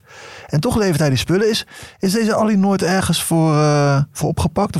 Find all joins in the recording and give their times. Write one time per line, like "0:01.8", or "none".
none